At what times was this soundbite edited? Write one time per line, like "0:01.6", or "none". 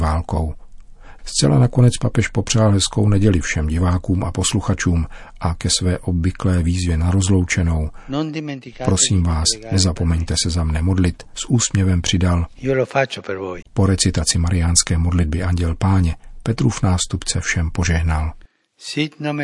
0:01.2
0:13.6